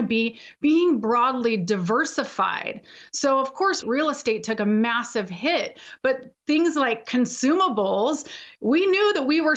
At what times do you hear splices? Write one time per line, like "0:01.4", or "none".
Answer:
0:03.8